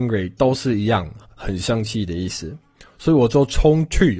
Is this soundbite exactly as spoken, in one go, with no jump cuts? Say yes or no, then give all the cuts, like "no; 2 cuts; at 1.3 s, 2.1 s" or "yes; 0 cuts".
yes; 0 cuts